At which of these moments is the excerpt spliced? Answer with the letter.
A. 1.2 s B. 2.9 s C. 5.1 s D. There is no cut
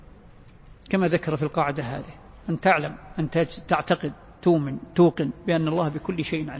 D